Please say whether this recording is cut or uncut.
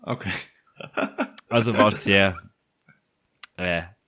cut